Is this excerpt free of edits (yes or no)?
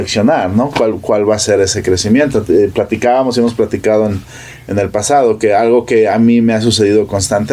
yes